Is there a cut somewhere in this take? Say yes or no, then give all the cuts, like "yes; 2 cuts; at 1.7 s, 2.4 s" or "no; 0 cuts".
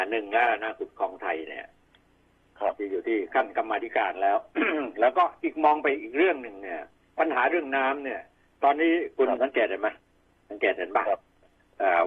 no; 0 cuts